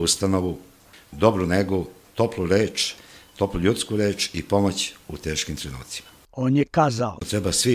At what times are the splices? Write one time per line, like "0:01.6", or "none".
0:00.9
0:06.2